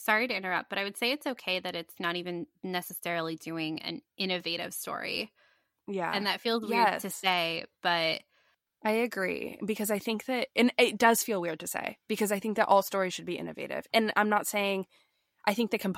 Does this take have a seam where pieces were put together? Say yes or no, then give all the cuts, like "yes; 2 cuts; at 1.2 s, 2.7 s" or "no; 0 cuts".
no; 0 cuts